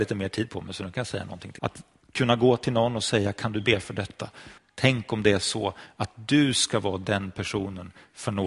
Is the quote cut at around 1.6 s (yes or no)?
yes